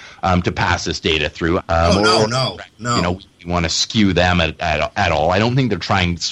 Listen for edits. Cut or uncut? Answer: cut